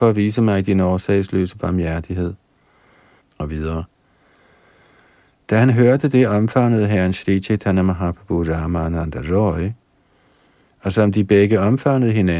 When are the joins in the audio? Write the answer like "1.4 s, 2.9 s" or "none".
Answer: 3.2 s

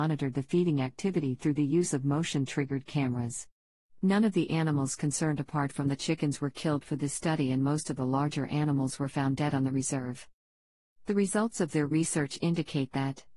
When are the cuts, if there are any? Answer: none

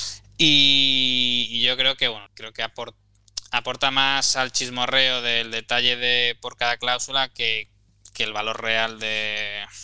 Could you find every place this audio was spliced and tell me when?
2.3 s

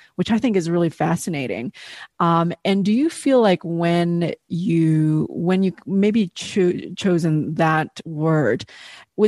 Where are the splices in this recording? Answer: none

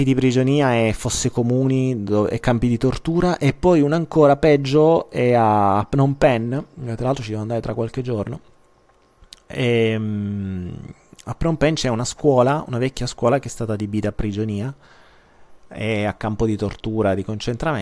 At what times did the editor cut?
none

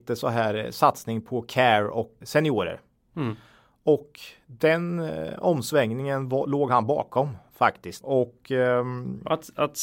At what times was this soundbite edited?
2.2 s, 8.0 s

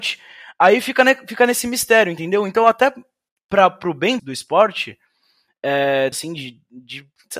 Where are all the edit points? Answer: 4.2 s, 6.1 s

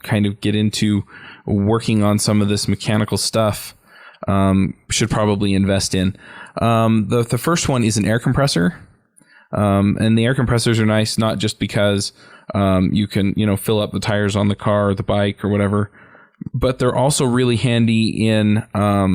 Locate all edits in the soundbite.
none

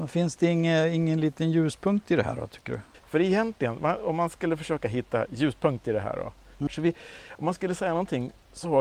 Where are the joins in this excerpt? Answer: 3.0 s, 6.7 s

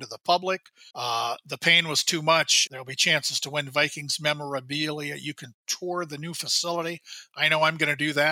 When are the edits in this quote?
0.9 s, 2.7 s

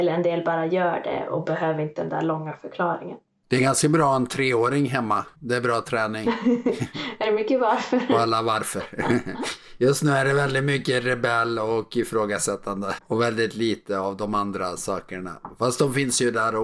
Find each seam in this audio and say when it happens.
5.4 s, 13.0 s

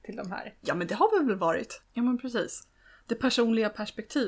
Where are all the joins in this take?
1.8 s

